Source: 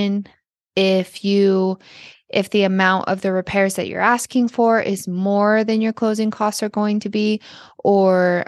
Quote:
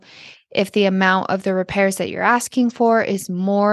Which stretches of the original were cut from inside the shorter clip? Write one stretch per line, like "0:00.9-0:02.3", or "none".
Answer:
none